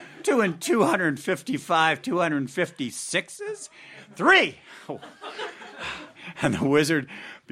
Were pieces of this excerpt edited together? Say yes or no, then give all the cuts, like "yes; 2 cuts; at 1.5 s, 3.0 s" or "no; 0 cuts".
no; 0 cuts